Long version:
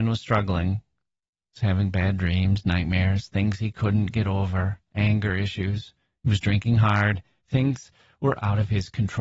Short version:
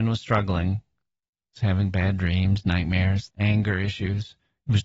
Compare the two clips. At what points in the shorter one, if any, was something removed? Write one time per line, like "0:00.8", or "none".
0:03.3